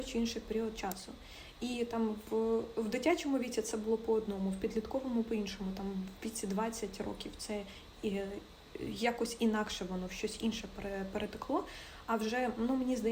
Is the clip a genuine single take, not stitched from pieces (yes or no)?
yes